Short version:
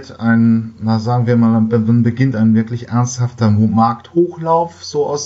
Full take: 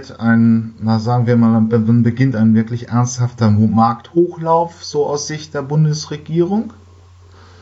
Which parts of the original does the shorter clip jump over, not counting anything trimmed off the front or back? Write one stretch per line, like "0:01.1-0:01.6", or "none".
none